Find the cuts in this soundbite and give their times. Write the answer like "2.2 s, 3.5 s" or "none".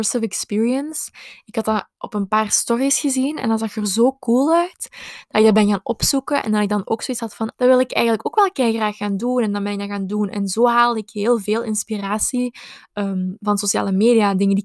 7.5 s